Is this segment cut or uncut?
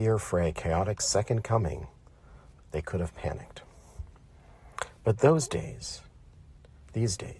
cut